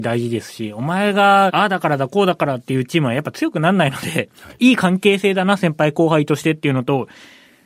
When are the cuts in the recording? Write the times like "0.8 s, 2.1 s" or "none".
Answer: 1.5 s

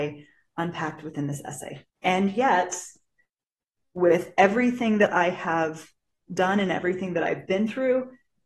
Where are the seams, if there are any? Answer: 1.9 s, 3.8 s

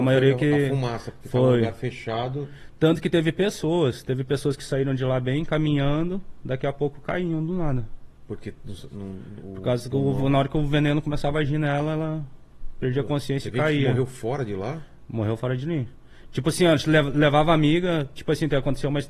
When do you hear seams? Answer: none

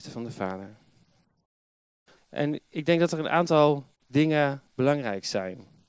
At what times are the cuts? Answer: 2.2 s, 3.9 s

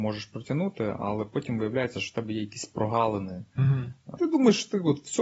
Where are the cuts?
4.2 s

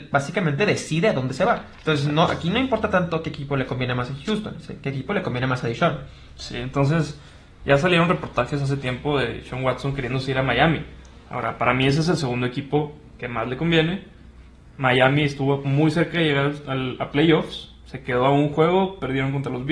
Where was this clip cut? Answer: none

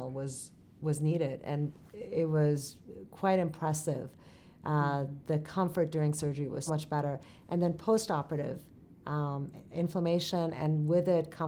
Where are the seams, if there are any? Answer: 6.7 s, 9.7 s

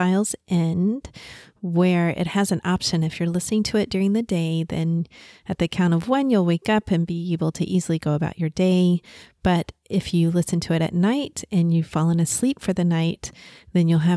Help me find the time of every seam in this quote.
none

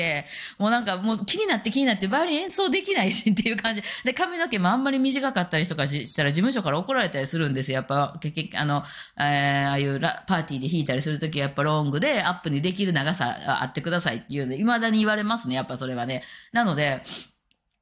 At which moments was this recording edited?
none

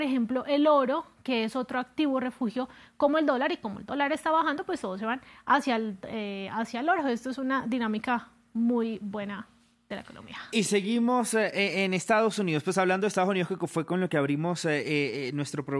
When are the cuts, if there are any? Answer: none

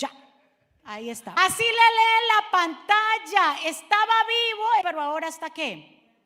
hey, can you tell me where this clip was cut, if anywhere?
1.4 s, 4.8 s

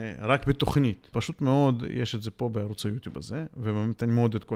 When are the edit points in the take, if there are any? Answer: 1.1 s

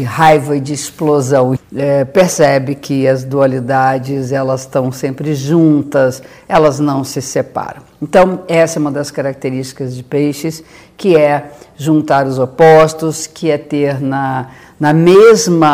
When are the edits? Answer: 1.6 s

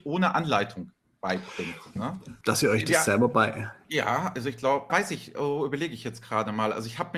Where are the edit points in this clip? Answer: 2.4 s, 4.9 s

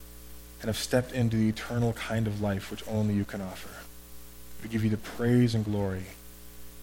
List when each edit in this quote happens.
none

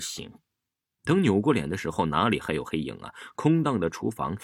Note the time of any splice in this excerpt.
0.9 s

